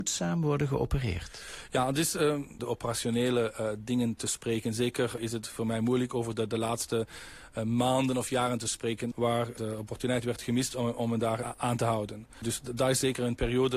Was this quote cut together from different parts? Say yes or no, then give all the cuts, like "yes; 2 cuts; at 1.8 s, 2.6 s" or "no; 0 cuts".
yes; 2 cuts; at 2.6 s, 9.1 s